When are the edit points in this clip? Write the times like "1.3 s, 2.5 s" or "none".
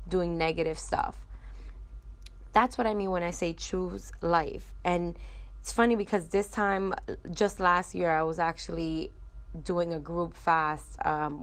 none